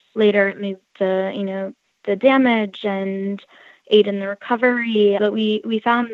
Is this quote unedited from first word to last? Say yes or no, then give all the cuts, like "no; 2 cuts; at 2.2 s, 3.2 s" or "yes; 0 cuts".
no; 1 cut; at 5.2 s